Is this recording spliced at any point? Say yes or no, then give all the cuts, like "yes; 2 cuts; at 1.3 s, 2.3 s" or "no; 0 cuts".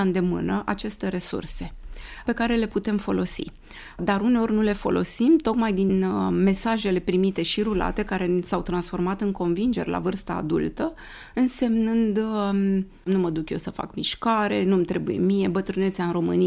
no; 0 cuts